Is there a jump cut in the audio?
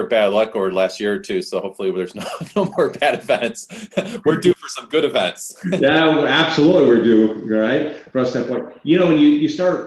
no; 0 cuts

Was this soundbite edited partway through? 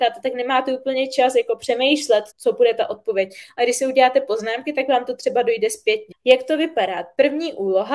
yes; 2 cuts; at 2.3 s, 6.1 s

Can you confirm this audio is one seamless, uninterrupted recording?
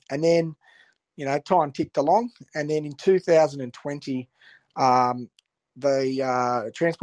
yes; 0 cuts

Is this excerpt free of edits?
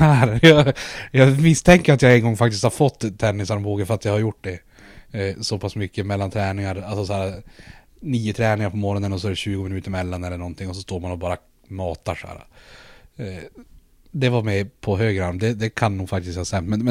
yes; 0 cuts

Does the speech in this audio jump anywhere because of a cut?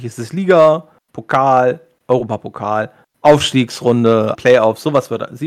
yes; 1 cut; at 4.3 s

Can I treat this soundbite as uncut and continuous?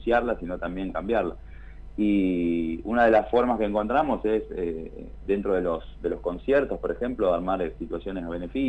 no; 1 cut; at 5.3 s

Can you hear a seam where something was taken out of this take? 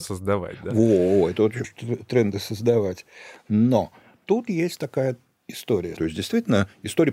yes; 2 cuts; at 1.6 s, 6.0 s

